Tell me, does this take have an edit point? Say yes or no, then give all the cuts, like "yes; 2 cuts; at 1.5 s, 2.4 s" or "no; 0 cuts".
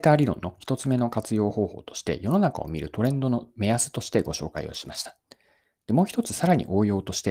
no; 0 cuts